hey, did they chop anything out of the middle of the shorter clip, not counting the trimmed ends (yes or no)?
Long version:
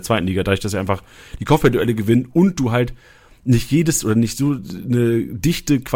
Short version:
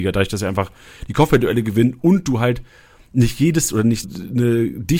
yes